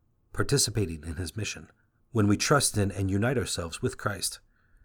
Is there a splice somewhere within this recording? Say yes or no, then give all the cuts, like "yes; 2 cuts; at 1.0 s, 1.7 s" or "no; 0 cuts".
yes; 1 cut; at 2.0 s